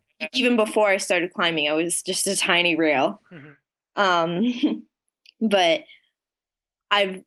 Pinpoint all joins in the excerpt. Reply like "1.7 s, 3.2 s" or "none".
none